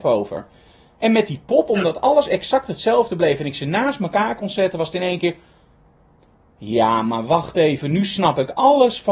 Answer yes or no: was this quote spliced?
no